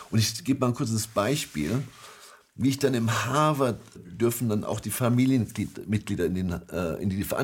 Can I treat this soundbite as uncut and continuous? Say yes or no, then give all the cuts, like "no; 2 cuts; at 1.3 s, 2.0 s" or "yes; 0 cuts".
no; 1 cut; at 3.9 s